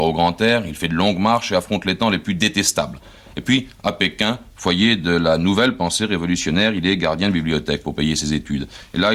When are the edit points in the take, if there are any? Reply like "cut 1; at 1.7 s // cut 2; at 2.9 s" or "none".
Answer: none